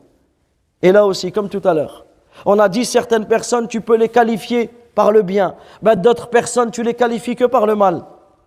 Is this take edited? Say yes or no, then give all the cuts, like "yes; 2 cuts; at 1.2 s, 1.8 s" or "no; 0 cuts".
no; 0 cuts